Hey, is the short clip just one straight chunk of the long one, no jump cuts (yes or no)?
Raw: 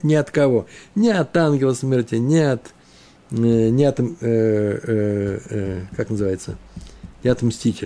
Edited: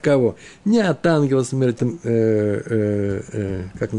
no